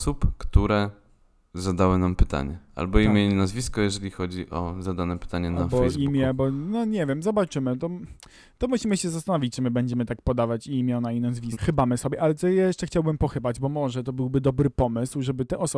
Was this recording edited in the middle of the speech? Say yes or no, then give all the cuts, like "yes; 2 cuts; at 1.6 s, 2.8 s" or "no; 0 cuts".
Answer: yes; 1 cut; at 11.5 s